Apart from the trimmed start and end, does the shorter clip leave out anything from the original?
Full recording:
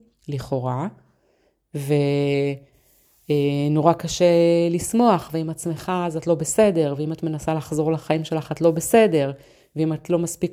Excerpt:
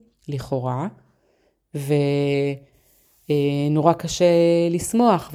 no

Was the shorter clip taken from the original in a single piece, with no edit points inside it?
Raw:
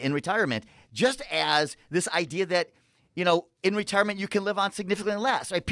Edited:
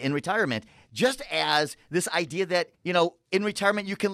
no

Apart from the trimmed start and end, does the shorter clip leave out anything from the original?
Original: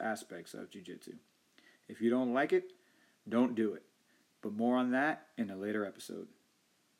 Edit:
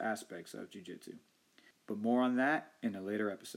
yes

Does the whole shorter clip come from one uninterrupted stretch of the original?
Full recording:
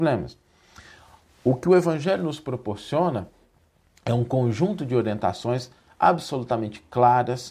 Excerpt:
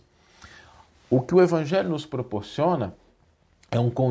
yes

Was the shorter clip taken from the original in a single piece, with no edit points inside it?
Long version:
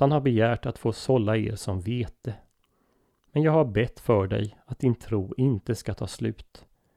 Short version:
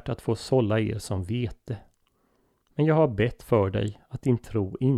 yes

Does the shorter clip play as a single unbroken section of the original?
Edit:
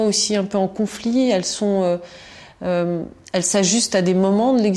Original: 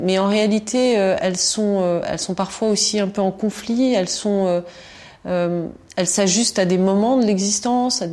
yes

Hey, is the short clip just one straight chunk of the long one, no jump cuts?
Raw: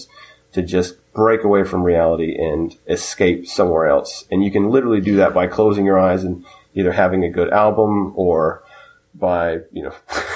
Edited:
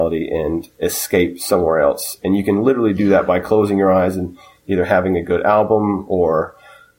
yes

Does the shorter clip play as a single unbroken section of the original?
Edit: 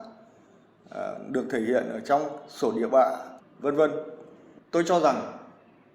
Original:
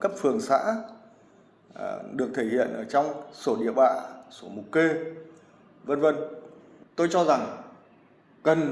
no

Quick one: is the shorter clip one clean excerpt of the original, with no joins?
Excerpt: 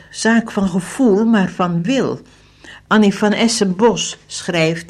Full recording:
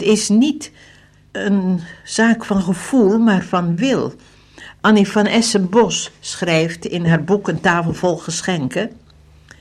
yes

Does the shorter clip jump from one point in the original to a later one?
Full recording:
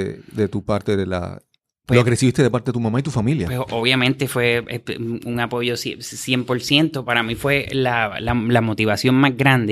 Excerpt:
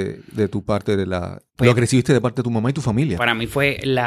yes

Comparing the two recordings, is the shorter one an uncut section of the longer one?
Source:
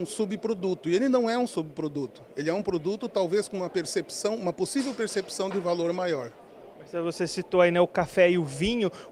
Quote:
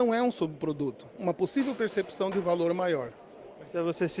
no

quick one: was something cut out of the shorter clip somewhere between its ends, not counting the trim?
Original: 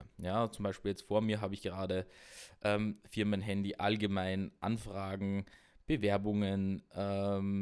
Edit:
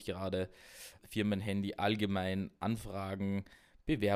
yes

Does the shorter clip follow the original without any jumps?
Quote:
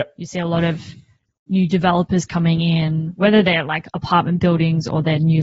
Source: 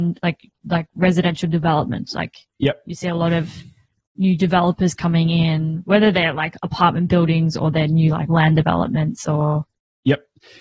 yes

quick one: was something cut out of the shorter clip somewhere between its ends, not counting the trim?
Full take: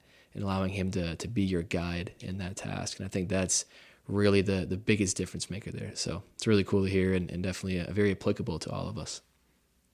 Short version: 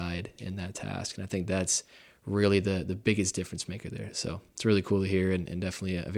no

